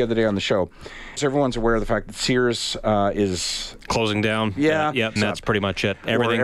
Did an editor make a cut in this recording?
yes; 2 cuts; at 1.2 s, 5.2 s

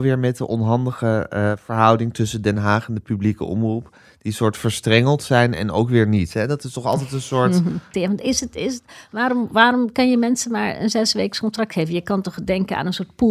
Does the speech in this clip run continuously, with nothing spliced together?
no; 1 cut; at 7.9 s

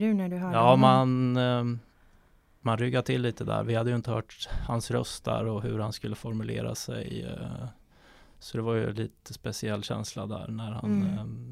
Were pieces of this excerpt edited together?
no; 0 cuts

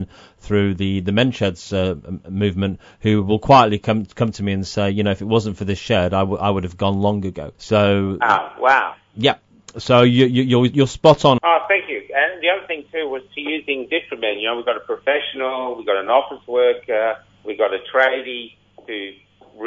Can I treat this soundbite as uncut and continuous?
no; 2 cuts; at 7.5 s, 11.4 s

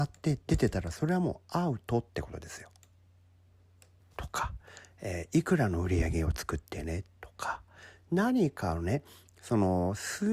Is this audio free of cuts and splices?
no; 1 cut; at 4.0 s

